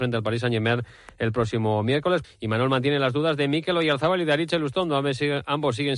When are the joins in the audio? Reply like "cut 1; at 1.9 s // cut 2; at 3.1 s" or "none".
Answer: cut 1; at 2.2 s